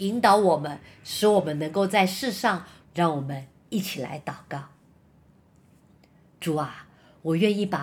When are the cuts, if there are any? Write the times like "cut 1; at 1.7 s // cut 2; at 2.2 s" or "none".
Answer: cut 1; at 2.8 s